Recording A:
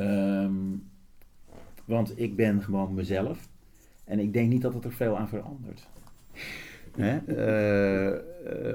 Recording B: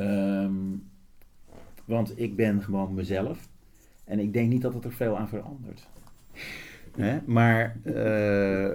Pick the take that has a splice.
A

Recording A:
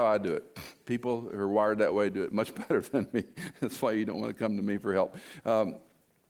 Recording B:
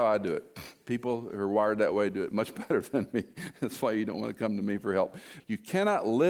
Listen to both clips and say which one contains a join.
B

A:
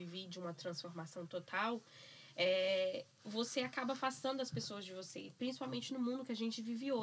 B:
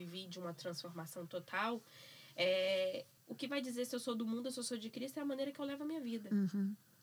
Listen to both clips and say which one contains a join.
B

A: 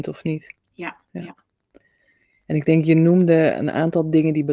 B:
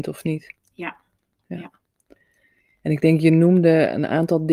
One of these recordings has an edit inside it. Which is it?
A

